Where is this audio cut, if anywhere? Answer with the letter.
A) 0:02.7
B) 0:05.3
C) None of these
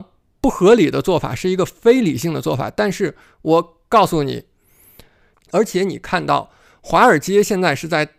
B